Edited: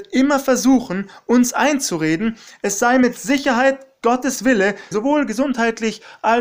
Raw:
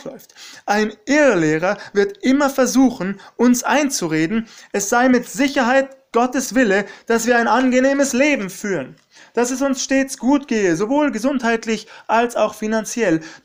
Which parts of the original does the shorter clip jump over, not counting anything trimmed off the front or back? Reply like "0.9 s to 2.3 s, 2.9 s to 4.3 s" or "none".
7.0 s to 10.8 s